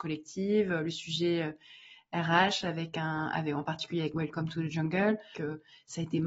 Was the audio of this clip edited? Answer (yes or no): yes